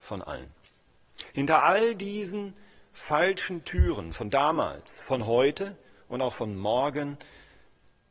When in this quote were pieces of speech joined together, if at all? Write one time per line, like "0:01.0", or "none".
none